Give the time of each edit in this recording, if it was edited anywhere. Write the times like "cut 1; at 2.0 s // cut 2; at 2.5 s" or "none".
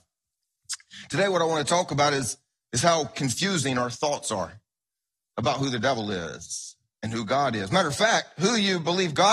none